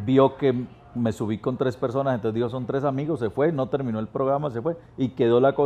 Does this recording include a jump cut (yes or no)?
no